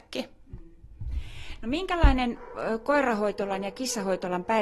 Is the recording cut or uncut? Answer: uncut